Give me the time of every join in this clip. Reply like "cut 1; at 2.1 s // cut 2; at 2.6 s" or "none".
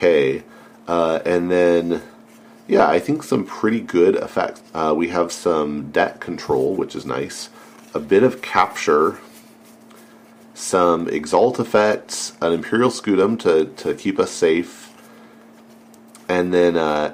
cut 1; at 4.6 s // cut 2; at 7.0 s